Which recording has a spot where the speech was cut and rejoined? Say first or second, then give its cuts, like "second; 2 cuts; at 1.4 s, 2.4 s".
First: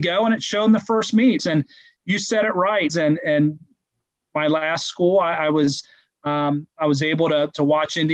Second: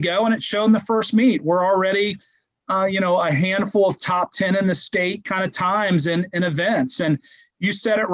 first; 2 cuts; at 1.4 s, 2.9 s